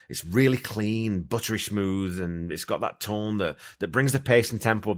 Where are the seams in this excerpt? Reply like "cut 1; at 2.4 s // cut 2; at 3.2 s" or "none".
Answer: none